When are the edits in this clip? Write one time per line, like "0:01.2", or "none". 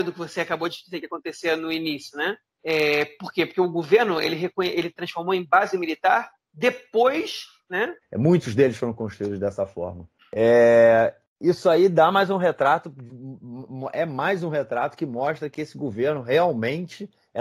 0:08.0